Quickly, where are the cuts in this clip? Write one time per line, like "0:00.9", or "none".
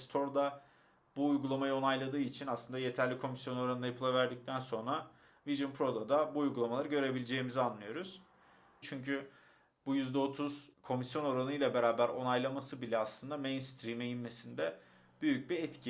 0:08.8
0:10.7